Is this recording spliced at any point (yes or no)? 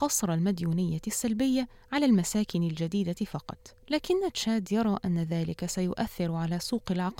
yes